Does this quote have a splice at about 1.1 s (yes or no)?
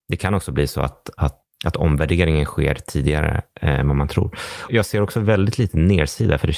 no